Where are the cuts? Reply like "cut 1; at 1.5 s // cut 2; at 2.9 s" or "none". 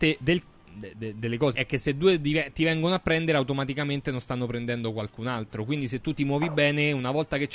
cut 1; at 1.5 s

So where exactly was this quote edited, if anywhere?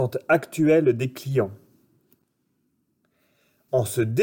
none

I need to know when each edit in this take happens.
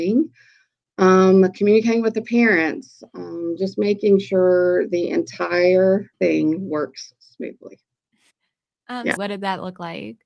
cut 1; at 6.1 s // cut 2; at 9.2 s

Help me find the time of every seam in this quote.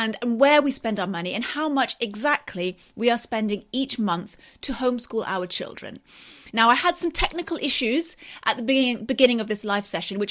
none

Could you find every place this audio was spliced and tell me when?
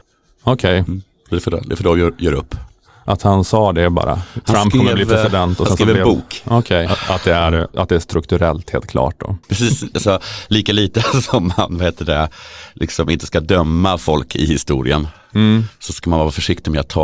cut 1; at 6.9 s // cut 2; at 9.4 s

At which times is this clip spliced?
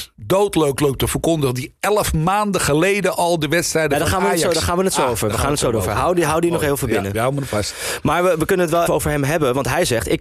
cut 1; at 8.9 s

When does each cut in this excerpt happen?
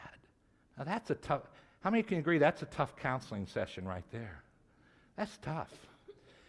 none

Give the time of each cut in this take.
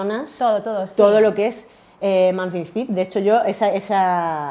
none

